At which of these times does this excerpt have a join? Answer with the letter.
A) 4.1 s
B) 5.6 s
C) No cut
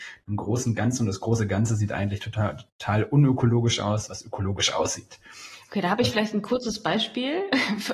A